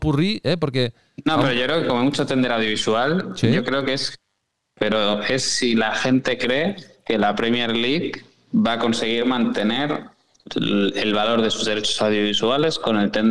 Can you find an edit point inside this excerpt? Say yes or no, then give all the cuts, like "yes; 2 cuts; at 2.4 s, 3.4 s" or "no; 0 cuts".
yes; 1 cut; at 4.8 s